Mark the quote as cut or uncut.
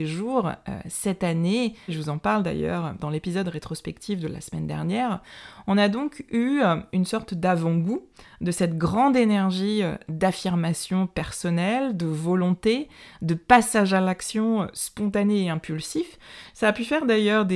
cut